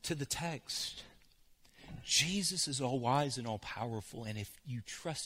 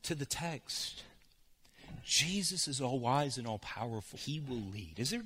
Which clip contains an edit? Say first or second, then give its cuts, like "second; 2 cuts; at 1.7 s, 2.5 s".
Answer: second; 1 cut; at 4.1 s